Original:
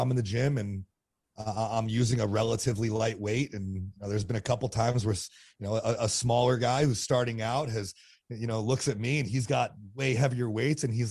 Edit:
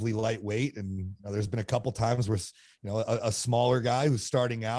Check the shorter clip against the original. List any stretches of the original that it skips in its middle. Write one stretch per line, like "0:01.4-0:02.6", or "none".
none